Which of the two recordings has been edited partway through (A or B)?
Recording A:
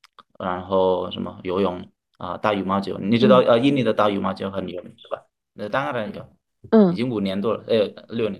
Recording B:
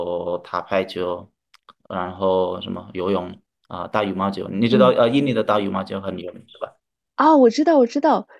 A